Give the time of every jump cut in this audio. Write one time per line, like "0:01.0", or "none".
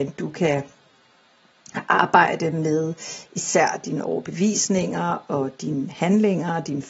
none